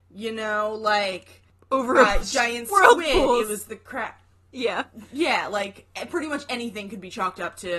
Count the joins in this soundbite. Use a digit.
1